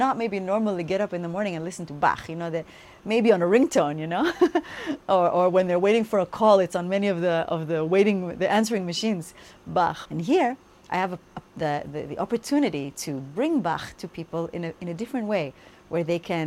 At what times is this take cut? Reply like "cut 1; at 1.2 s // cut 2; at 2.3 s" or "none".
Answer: cut 1; at 10.1 s